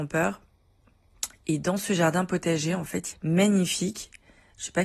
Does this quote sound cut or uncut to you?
cut